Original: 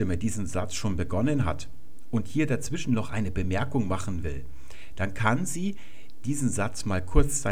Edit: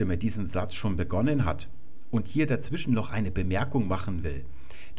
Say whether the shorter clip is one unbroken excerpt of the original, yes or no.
yes